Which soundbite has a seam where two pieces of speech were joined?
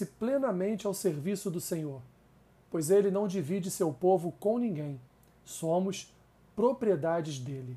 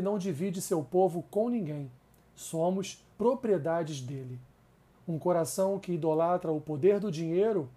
second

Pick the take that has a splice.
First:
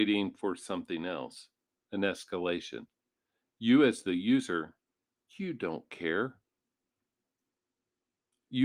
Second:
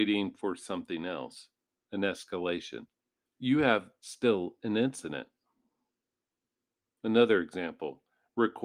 second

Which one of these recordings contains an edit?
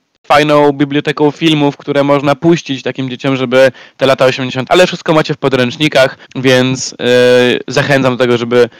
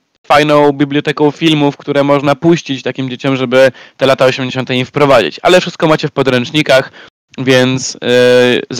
first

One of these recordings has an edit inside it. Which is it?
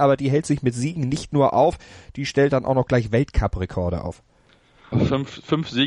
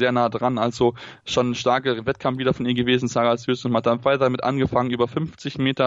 first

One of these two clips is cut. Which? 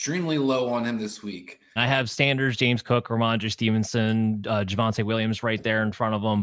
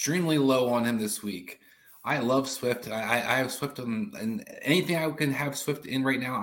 first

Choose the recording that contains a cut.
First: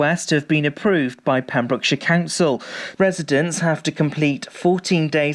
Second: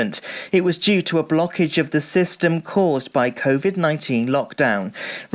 first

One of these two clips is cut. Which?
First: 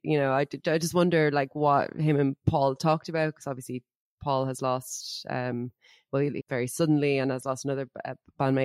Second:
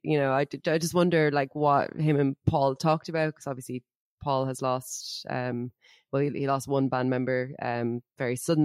first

